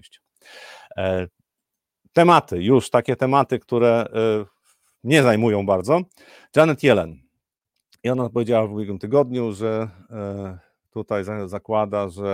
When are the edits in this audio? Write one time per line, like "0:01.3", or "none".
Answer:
none